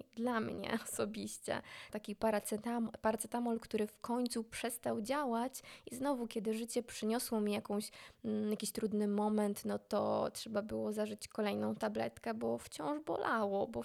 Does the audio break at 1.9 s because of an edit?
yes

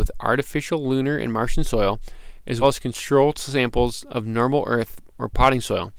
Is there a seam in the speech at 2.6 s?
yes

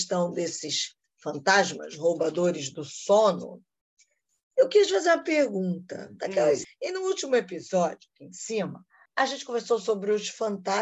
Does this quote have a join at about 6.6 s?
yes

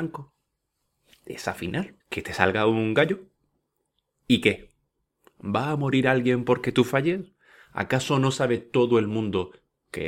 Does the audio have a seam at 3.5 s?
no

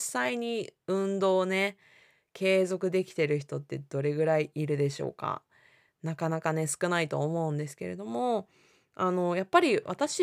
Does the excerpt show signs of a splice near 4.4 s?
no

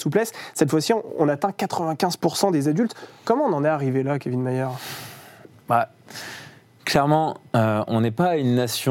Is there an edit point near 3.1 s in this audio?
no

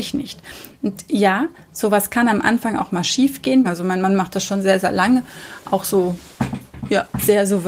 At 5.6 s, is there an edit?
no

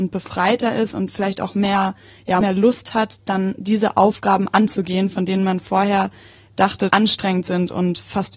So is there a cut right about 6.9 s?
yes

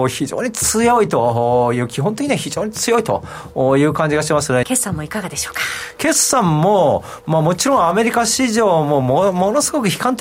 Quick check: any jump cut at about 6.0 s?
no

